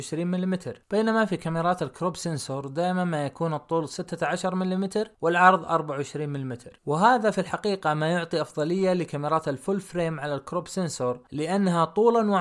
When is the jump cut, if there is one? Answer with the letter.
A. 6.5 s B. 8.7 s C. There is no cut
C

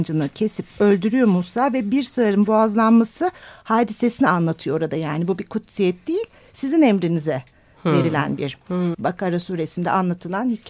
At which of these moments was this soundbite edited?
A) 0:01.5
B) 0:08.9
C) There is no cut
B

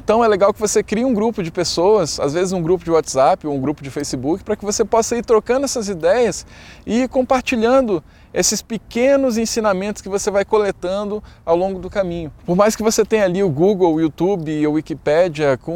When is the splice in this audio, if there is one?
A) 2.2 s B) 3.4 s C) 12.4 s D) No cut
C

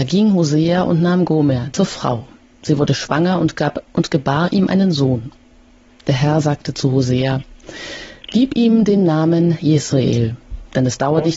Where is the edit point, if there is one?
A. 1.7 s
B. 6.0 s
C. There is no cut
A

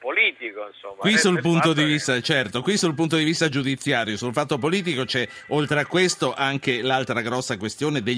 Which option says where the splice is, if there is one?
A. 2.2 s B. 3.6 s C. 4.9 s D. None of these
D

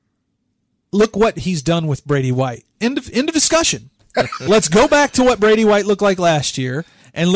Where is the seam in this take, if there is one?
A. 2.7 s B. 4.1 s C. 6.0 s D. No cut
B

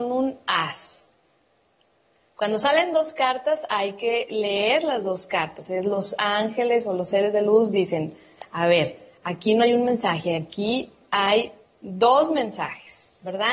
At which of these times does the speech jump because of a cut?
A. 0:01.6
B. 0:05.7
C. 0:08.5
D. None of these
D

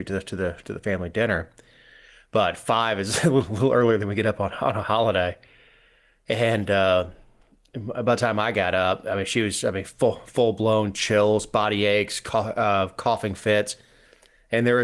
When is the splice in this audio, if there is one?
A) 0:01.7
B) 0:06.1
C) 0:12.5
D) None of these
D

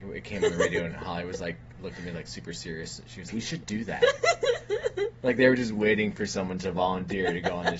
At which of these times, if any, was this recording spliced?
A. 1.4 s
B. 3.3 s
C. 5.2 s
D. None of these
B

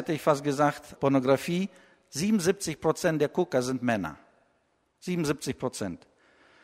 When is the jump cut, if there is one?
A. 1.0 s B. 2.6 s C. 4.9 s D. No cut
A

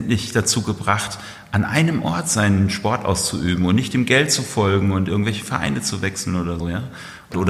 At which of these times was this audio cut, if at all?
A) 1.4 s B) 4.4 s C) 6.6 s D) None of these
C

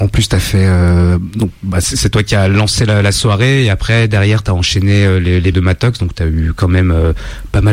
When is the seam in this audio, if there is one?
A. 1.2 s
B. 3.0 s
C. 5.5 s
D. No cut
C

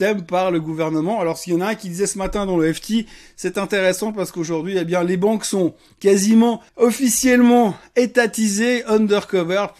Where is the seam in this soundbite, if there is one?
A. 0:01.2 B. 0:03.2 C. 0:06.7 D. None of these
C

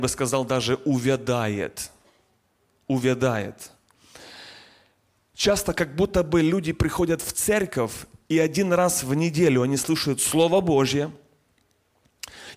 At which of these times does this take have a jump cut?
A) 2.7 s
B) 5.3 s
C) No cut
B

